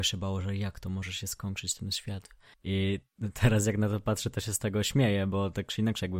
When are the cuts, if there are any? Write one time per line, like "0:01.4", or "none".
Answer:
0:02.5